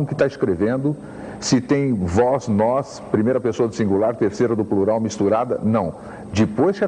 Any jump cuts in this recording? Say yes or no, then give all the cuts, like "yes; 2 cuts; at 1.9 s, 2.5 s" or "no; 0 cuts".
no; 0 cuts